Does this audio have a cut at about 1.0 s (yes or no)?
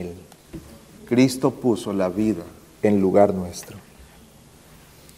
yes